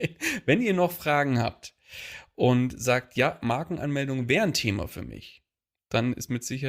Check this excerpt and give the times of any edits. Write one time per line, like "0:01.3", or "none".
none